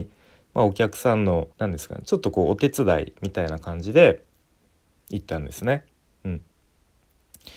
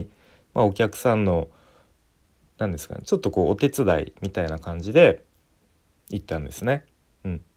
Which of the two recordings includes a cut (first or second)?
first